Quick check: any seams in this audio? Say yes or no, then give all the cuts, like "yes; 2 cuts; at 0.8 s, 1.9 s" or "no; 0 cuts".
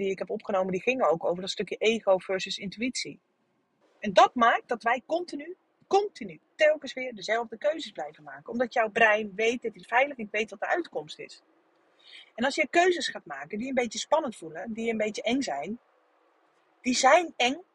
yes; 1 cut; at 3.8 s